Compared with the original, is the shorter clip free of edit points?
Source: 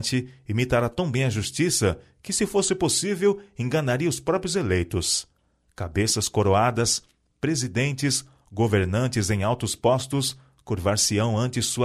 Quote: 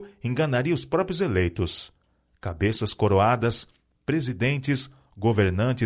yes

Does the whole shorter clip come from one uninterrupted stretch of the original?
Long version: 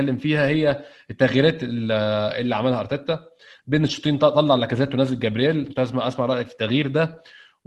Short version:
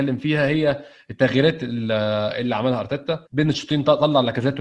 no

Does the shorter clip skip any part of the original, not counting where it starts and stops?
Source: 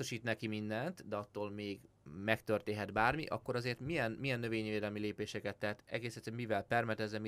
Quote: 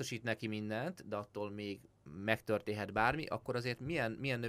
no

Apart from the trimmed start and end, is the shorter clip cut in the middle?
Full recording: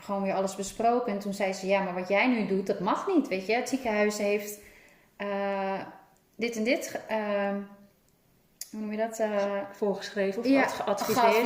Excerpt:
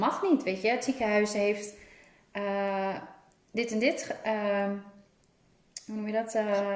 no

